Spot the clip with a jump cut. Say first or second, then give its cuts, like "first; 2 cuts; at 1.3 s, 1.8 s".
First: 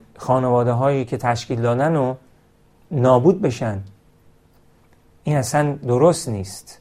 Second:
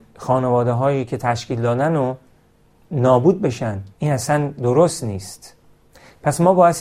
second; 1 cut; at 3.9 s